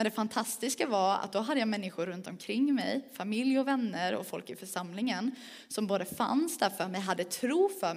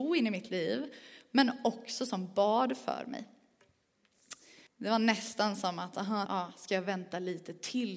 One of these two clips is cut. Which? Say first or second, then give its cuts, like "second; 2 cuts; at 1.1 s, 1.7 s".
second; 2 cuts; at 4.7 s, 6.3 s